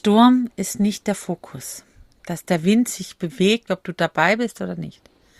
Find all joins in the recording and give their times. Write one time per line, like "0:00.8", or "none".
0:03.7